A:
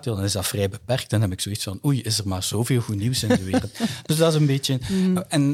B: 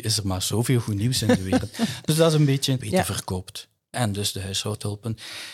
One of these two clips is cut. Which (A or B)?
B